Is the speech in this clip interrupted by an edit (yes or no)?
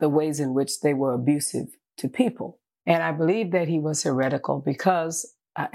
yes